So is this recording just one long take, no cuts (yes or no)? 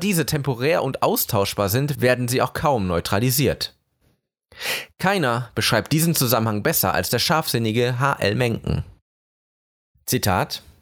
yes